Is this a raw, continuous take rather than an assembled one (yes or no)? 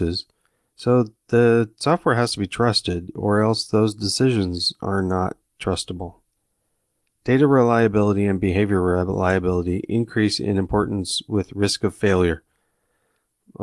yes